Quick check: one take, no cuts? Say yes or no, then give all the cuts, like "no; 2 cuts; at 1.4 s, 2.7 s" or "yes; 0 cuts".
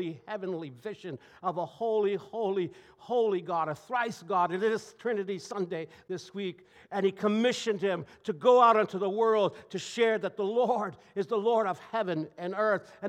yes; 0 cuts